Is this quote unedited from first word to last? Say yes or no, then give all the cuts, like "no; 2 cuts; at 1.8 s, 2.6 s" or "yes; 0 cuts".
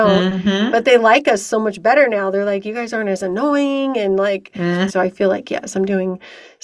no; 1 cut; at 4.9 s